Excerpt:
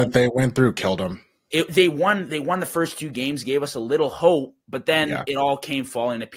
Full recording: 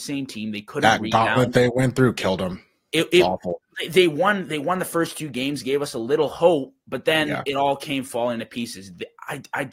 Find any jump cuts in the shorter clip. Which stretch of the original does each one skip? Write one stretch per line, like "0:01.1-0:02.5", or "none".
0:03.1-0:03.9